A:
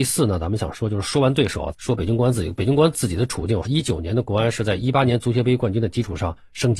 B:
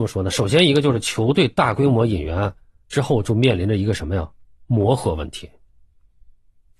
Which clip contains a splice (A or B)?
A